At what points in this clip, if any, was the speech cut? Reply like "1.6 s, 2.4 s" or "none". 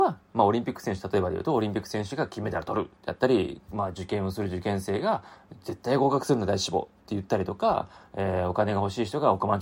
none